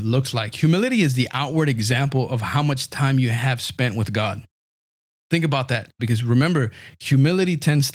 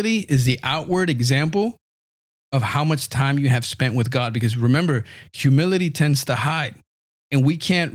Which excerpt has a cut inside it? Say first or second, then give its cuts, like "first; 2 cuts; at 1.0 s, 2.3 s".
first; 1 cut; at 6.0 s